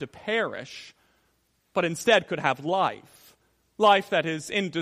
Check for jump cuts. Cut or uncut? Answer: uncut